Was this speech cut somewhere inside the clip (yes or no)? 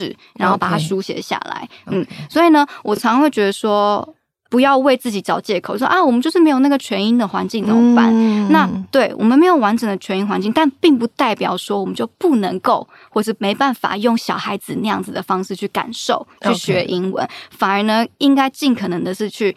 no